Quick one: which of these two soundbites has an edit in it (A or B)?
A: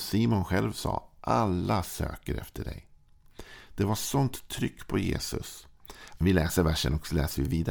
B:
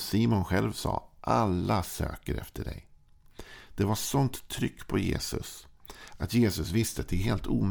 A